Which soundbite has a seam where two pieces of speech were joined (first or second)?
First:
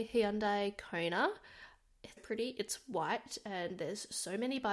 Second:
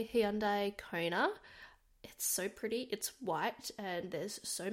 first